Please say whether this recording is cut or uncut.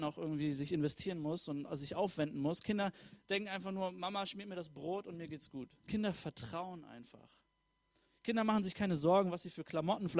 cut